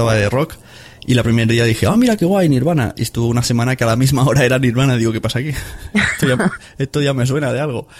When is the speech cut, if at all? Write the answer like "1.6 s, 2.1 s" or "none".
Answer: none